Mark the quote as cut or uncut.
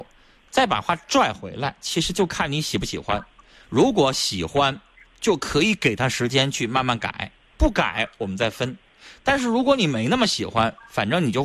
uncut